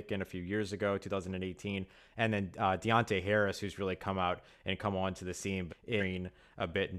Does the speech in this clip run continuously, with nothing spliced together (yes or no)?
no